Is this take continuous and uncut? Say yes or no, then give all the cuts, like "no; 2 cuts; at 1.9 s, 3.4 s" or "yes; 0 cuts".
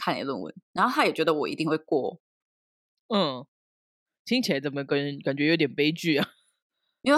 yes; 0 cuts